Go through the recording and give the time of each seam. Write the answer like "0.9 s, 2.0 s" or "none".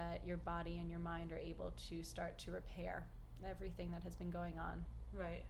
none